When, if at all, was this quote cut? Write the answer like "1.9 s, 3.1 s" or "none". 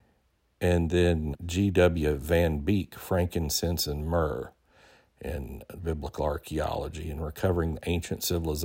1.3 s